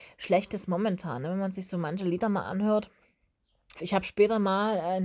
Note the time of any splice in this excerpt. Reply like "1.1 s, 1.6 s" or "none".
3.7 s